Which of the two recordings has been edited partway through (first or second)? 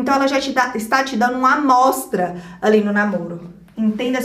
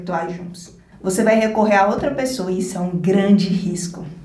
second